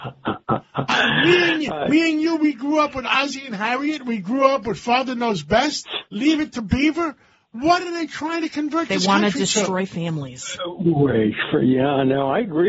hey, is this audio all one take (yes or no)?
yes